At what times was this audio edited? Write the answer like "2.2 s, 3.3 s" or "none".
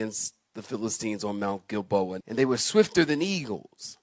2.2 s